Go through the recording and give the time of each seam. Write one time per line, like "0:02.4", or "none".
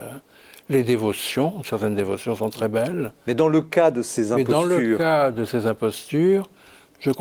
none